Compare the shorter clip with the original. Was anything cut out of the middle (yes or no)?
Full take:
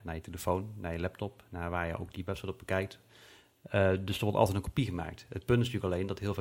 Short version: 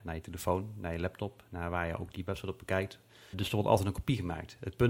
yes